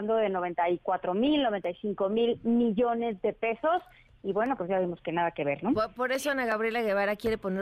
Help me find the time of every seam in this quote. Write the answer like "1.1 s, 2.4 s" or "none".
none